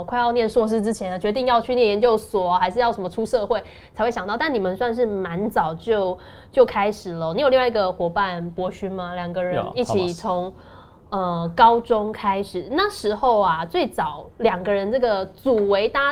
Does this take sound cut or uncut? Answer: uncut